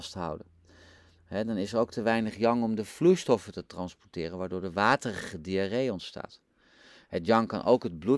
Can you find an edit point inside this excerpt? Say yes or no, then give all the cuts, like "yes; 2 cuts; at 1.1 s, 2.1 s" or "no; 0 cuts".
no; 0 cuts